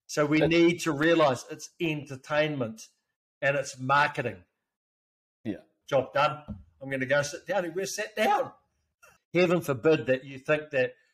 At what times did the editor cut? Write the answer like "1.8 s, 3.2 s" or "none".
5.8 s, 9.2 s